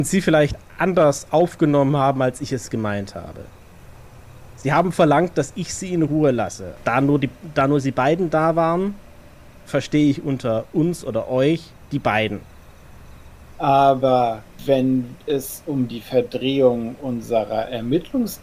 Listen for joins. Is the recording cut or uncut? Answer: cut